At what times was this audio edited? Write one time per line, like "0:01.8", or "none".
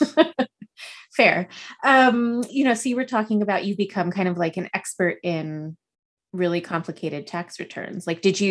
0:02.5

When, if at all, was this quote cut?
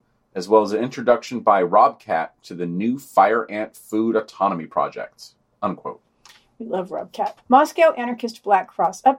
0:07.4

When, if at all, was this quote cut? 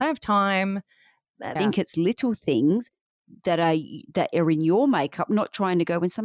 0:01.6

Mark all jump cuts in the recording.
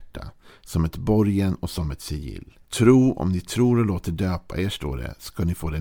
0:02.6

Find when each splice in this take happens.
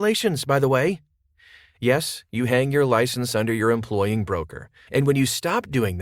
0:04.9

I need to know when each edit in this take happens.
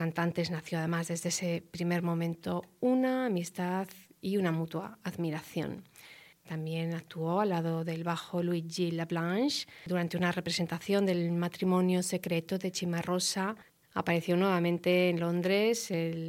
0:06.4
0:13.8

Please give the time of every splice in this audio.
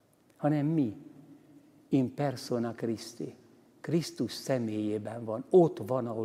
none

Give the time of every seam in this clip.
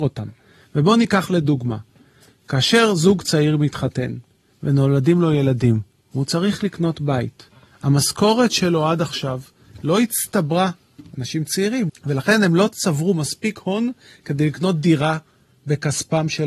0:11.9

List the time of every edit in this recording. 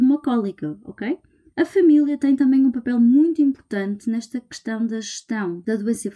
0:01.5

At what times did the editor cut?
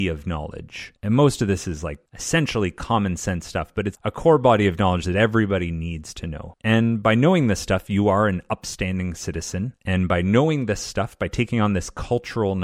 none

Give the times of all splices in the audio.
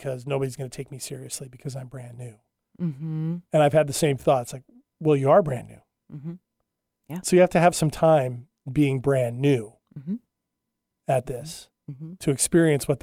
none

